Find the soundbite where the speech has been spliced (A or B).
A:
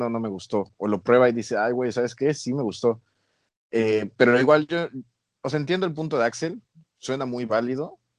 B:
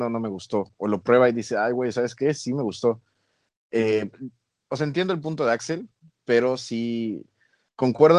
B